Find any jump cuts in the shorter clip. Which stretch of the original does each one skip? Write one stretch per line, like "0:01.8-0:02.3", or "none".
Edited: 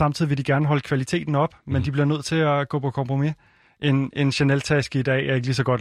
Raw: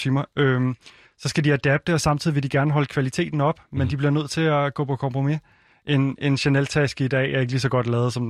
none